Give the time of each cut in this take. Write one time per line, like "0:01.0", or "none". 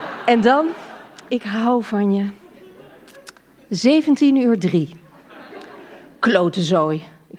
0:01.3